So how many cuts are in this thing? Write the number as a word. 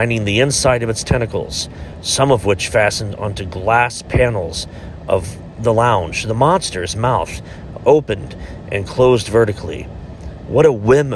one